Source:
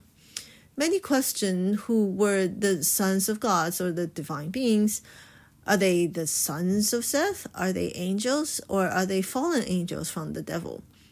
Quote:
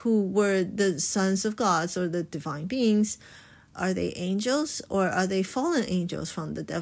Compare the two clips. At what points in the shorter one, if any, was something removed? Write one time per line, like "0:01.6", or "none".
0:03.7